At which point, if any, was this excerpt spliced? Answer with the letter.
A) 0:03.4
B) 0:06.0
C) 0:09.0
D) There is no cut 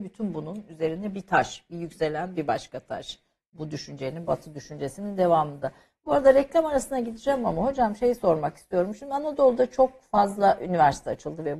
D